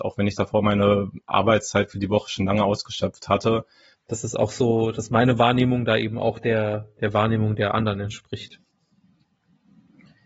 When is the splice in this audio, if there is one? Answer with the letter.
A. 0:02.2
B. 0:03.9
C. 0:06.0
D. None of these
B